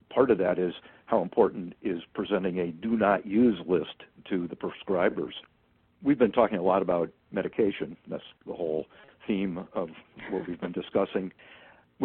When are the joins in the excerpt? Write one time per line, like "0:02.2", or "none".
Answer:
0:05.9